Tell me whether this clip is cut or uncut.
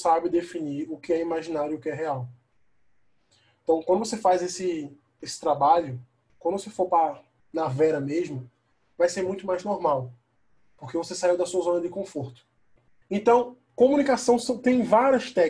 cut